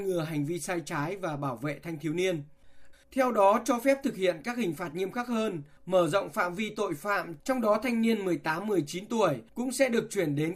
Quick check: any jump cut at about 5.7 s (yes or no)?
no